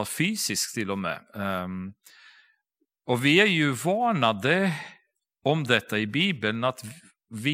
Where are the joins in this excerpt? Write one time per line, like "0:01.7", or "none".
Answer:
none